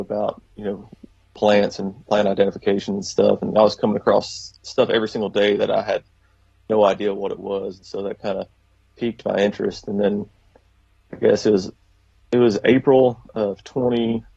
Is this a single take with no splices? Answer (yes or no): yes